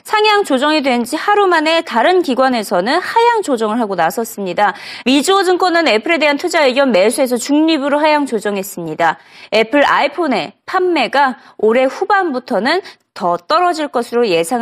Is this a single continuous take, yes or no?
no